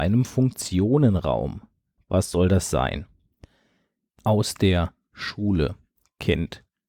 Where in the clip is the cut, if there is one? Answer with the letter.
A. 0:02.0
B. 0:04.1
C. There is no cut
A